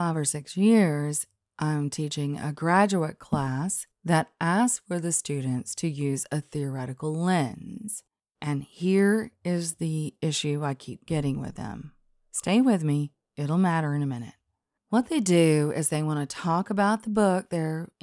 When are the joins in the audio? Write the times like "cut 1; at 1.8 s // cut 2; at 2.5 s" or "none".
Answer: none